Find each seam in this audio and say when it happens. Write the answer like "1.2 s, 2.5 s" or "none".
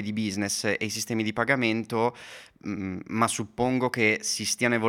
none